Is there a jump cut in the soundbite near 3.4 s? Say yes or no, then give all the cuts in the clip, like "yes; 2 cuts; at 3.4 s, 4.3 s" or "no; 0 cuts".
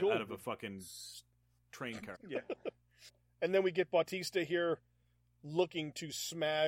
no; 1 cut; at 2.1 s